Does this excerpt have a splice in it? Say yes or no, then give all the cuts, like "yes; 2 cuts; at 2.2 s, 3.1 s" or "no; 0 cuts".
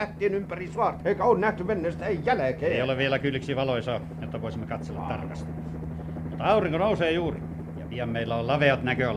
yes; 1 cut; at 1.0 s